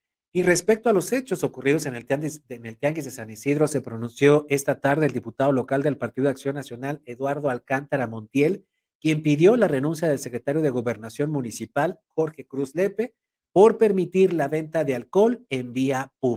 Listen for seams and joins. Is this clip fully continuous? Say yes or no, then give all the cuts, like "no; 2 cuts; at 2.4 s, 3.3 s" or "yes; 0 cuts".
yes; 0 cuts